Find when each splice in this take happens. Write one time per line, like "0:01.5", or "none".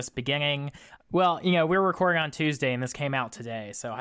0:01.0